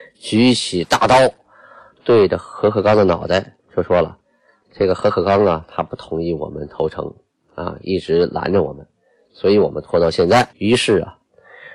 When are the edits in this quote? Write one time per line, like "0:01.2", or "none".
0:10.5